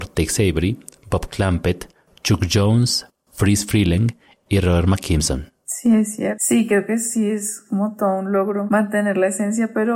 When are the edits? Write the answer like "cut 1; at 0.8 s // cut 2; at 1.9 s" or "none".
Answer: cut 1; at 5.6 s